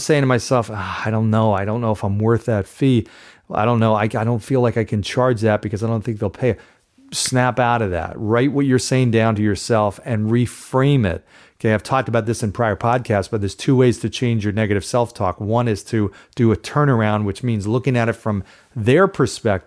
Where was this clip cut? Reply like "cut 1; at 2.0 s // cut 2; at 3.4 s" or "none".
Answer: none